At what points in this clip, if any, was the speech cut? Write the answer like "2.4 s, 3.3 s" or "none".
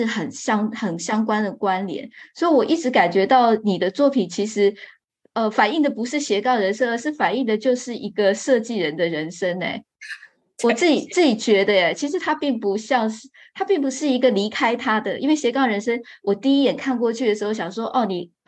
none